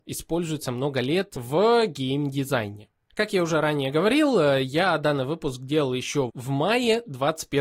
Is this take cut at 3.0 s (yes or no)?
no